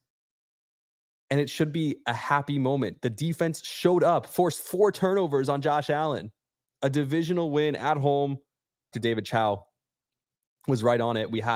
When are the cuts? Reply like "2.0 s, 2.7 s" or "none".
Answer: 8.9 s